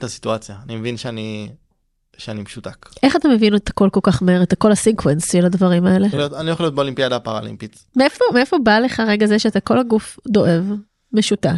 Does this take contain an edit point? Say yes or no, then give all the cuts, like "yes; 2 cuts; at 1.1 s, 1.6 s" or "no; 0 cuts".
yes; 1 cut; at 6.1 s